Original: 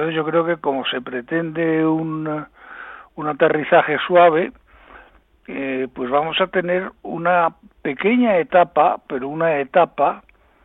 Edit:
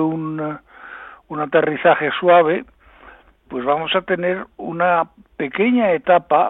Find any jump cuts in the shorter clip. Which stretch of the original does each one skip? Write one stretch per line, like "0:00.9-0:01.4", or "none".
0:05.3-0:05.9